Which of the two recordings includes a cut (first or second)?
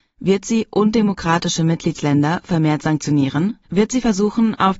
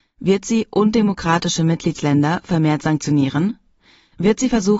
first